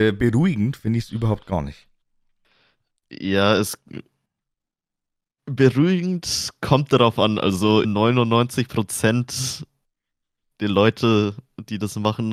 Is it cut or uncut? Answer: cut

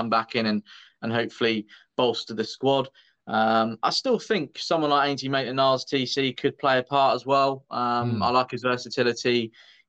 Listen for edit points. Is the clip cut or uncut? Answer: uncut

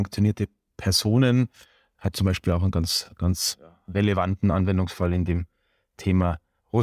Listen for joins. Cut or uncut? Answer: uncut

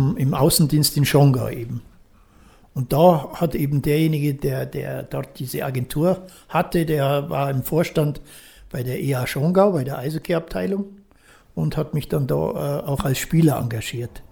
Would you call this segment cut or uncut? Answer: uncut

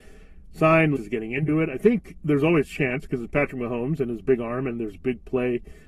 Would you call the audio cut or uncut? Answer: cut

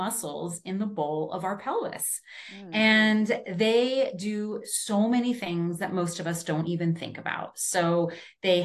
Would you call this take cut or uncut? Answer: uncut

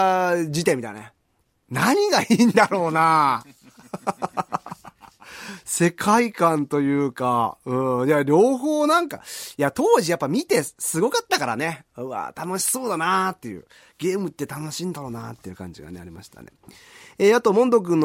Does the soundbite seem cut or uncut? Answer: cut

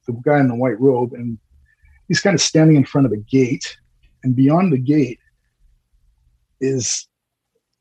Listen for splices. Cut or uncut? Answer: uncut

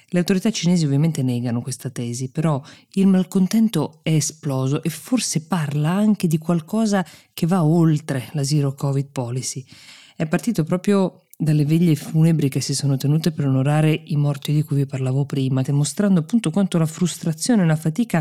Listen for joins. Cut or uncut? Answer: cut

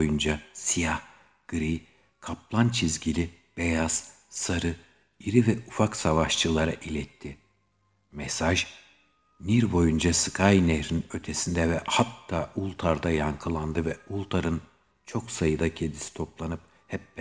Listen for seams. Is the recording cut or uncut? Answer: uncut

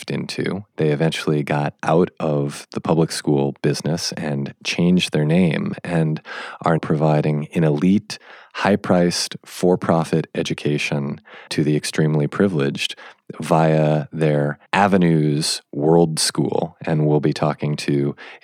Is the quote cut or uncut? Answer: cut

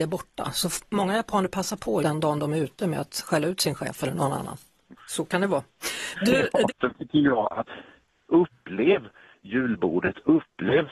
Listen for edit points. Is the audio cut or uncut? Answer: cut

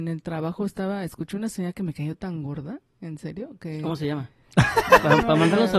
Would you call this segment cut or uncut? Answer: uncut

